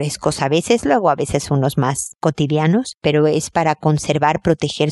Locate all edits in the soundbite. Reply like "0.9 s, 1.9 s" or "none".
none